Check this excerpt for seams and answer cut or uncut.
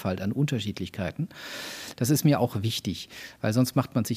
cut